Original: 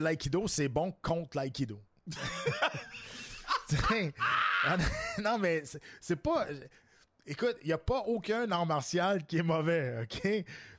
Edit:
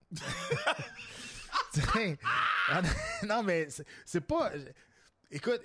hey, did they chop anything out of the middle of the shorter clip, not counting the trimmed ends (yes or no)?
no